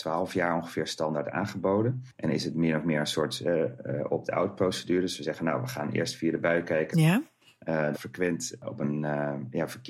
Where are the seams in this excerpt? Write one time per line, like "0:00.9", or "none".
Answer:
0:06.9
0:07.9